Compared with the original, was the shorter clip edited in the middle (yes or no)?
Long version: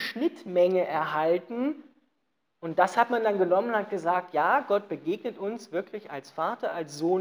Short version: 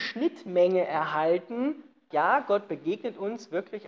yes